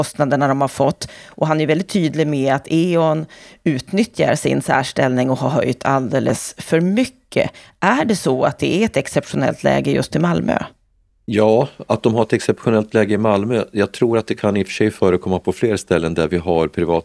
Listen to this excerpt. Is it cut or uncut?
uncut